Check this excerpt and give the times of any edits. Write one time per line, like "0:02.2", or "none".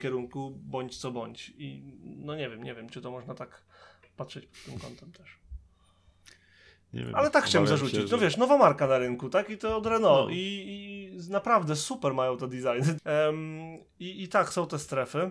0:13.0

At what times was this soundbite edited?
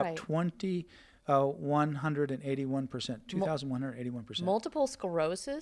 none

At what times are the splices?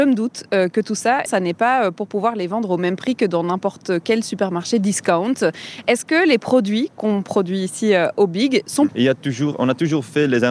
0:01.3
0:08.9

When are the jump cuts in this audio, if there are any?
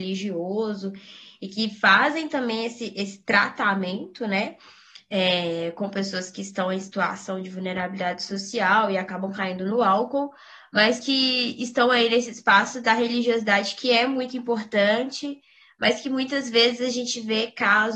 none

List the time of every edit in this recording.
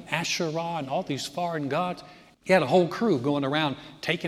0:02.3

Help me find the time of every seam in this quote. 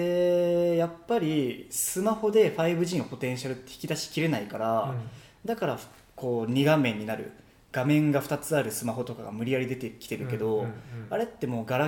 none

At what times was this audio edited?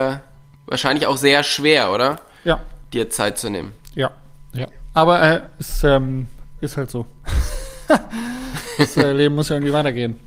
none

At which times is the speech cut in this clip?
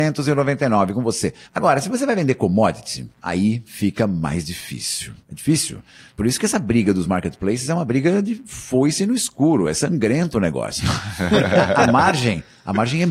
0:01.4

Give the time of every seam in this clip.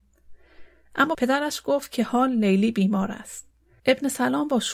0:03.8

